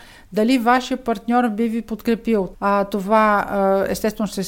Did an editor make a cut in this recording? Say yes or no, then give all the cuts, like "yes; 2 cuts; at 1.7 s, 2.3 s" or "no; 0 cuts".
yes; 1 cut; at 2.5 s